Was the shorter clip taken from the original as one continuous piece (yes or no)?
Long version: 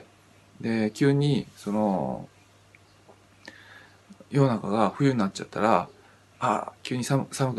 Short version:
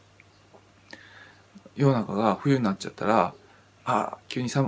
yes